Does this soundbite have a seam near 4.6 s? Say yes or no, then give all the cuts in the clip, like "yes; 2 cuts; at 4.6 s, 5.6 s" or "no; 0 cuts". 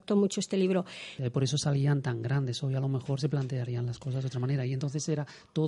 no; 1 cut; at 1.2 s